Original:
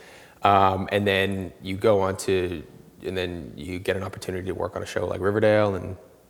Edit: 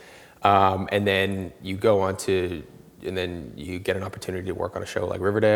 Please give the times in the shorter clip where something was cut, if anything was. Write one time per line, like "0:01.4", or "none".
none